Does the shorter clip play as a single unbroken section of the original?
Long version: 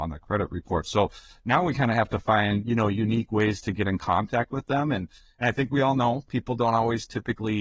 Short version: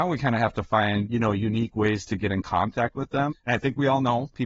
no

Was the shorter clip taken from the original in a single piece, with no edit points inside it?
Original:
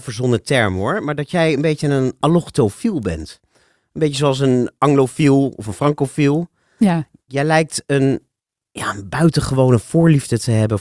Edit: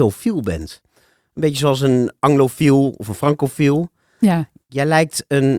yes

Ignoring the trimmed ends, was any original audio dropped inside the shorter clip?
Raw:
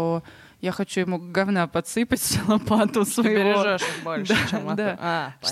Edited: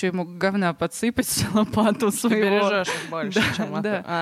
no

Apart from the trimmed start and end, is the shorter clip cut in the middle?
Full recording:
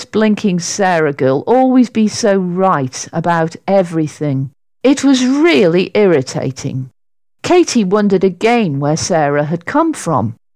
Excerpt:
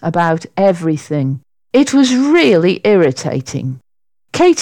no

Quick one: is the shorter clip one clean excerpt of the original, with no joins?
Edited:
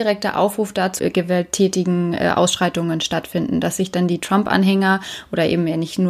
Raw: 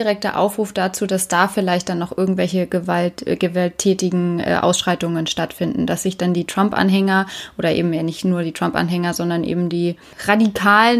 no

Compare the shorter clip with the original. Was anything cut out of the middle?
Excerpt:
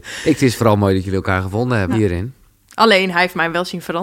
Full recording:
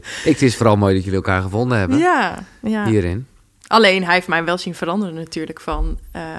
yes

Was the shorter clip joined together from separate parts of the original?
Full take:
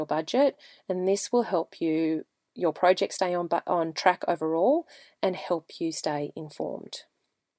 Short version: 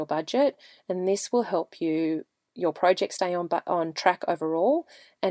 no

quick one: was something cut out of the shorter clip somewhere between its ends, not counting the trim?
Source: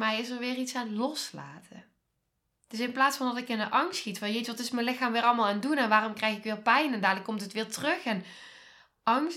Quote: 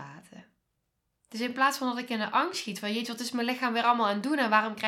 no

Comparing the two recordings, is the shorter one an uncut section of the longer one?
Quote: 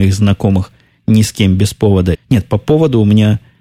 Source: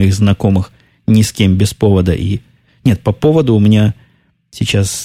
no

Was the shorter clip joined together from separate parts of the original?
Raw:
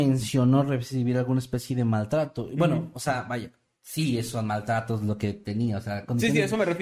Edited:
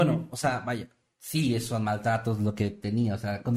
no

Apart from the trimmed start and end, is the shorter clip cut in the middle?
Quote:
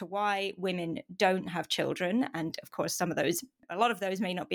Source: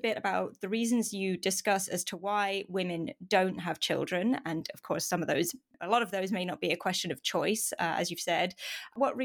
no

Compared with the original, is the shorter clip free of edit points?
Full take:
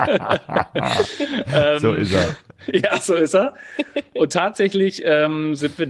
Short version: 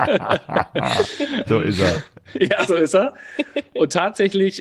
no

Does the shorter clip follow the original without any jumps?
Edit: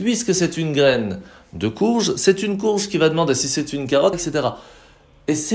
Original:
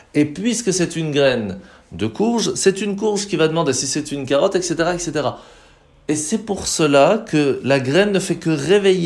no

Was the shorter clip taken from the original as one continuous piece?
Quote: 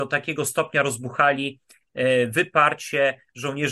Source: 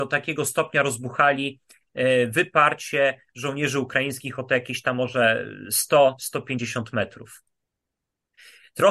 yes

